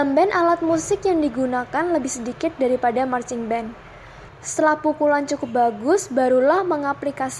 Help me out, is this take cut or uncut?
cut